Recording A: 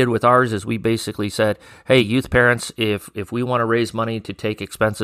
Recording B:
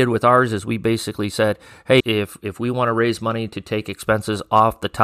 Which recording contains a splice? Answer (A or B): B